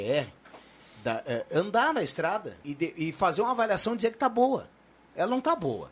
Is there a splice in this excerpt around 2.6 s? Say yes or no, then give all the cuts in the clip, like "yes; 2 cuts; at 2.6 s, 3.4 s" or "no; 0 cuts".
yes; 1 cut; at 2.6 s